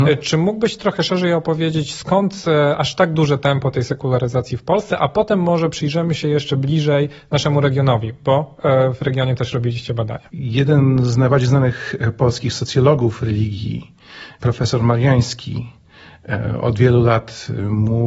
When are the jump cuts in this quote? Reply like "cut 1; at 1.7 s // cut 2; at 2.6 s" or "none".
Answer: none